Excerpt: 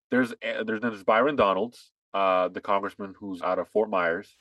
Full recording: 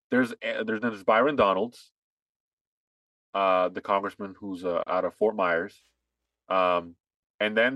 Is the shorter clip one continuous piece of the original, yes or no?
no